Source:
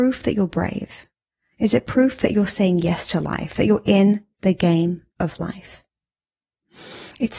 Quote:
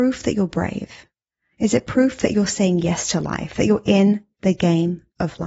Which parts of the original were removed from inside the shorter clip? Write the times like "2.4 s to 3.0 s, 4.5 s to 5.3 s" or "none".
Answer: none